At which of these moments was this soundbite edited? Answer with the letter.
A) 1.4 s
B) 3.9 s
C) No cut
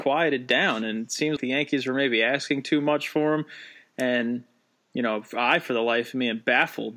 A